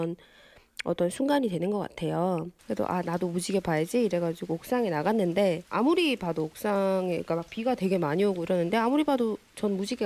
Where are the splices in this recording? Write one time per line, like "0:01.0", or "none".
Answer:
0:02.6
0:05.7